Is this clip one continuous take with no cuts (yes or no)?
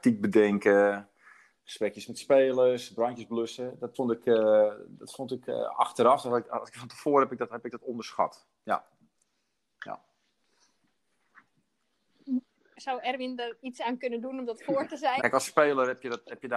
no